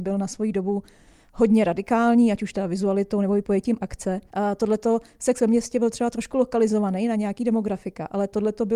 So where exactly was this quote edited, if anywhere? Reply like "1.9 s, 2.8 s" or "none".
4.3 s